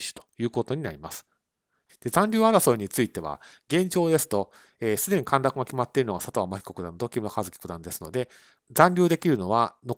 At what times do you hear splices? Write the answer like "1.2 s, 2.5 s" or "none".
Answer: 1.8 s